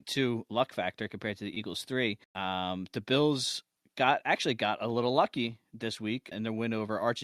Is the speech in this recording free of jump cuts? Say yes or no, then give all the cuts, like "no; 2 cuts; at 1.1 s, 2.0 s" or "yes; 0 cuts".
no; 2 cuts; at 2.2 s, 6.3 s